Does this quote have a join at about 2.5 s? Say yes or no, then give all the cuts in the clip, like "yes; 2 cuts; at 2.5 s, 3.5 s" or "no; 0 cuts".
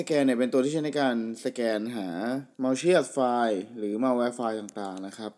yes; 1 cut; at 2.5 s